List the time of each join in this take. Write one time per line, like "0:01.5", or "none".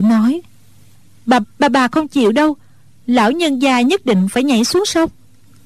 0:01.4